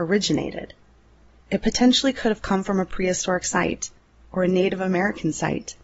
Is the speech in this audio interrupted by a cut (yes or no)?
yes